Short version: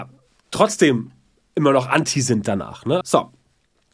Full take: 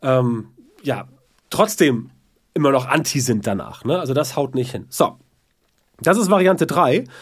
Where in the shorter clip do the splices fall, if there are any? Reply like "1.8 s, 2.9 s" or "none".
3.0 s